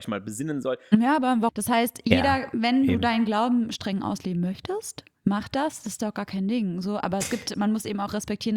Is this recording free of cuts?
no; 1 cut; at 1.5 s

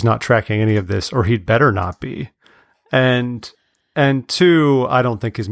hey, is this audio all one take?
yes; 0 cuts

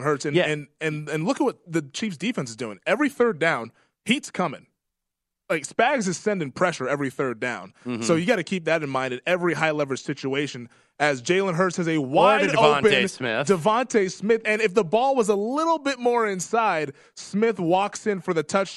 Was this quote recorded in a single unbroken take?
yes; 0 cuts

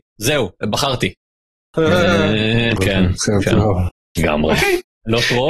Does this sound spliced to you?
yes; 2 cuts; at 2.8 s, 4.2 s

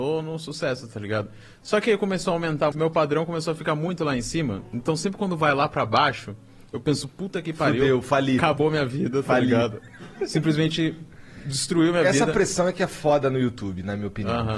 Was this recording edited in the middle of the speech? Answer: yes; 1 cut; at 2.7 s

